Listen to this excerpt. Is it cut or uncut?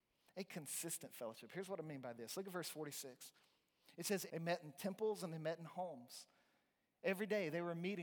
cut